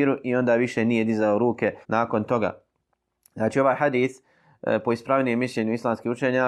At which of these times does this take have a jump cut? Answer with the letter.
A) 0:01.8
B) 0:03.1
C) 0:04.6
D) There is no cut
A